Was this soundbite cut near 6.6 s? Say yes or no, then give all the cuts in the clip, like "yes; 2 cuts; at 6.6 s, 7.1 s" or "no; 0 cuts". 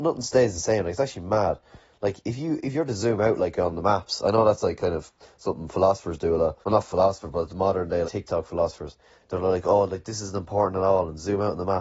yes; 2 cuts; at 6.6 s, 8.0 s